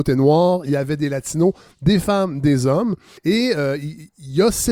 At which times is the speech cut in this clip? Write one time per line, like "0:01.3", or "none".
0:03.2